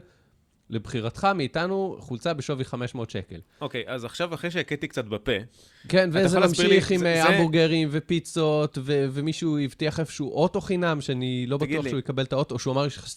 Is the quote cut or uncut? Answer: uncut